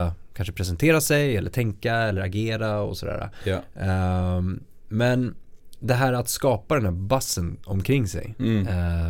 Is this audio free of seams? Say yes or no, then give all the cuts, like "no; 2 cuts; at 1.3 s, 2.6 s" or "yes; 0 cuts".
yes; 0 cuts